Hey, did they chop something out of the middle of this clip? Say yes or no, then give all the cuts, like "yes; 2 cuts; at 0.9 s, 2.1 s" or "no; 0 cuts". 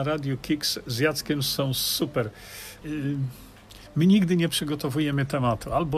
yes; 1 cut; at 2.8 s